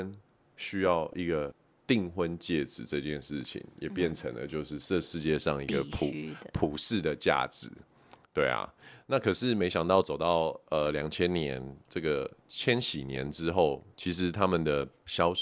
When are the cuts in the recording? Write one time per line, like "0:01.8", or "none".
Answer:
none